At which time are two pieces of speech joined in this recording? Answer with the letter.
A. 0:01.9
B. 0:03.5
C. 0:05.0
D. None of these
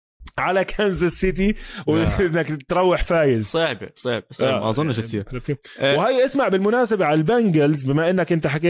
D